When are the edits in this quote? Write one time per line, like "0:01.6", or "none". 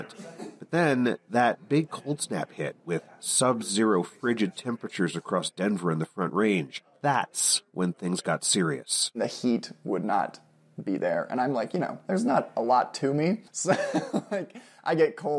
0:13.5